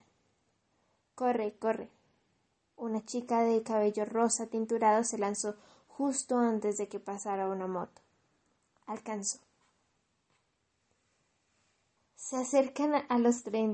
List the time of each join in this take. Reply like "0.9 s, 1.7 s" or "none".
1.6 s, 12.0 s